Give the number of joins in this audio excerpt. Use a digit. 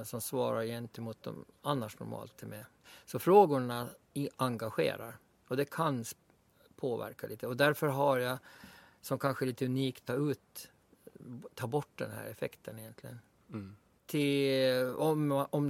2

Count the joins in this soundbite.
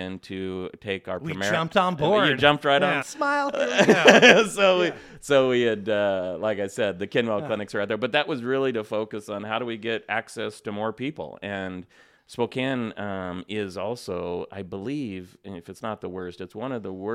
1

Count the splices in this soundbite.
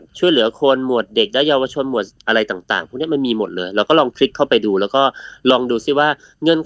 0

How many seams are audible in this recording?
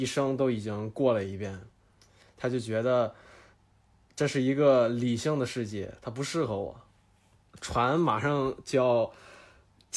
0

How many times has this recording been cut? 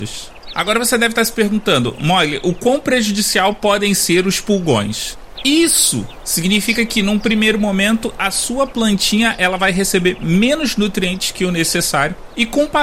1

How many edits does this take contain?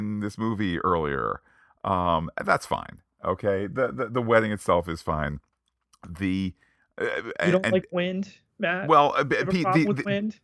0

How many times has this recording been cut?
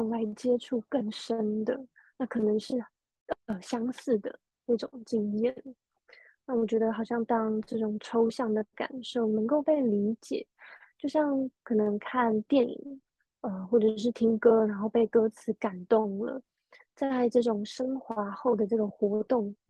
0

